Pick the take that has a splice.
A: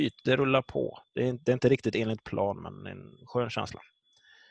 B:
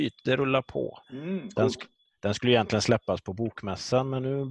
B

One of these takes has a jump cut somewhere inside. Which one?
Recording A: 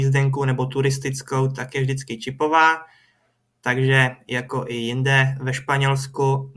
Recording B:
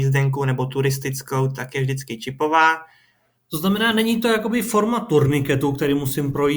B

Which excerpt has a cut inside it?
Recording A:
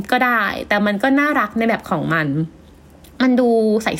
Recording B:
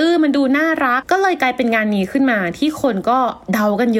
B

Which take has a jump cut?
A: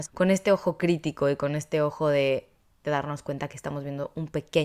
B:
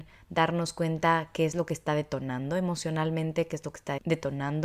A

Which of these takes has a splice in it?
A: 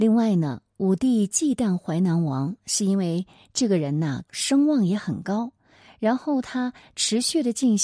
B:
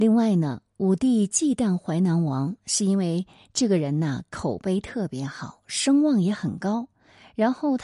A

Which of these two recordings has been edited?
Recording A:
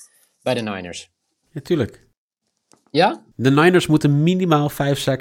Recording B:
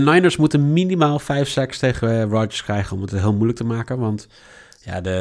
A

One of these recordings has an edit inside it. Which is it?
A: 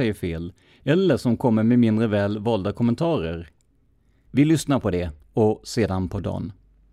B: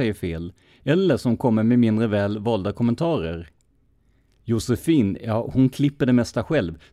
A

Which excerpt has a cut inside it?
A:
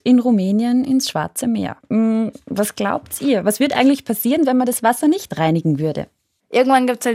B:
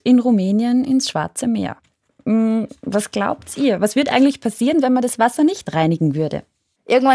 A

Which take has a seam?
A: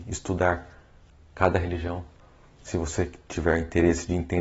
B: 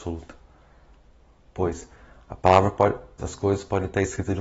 B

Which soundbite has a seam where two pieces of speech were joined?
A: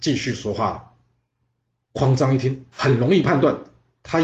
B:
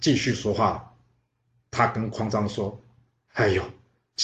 A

